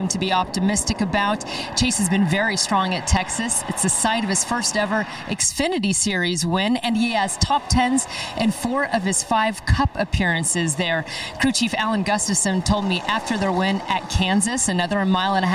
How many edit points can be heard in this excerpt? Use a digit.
0